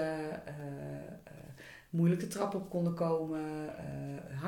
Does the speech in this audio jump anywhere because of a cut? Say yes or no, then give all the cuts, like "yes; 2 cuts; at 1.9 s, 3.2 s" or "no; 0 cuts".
no; 0 cuts